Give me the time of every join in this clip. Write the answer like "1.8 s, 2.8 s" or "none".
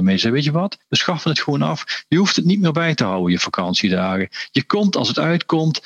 none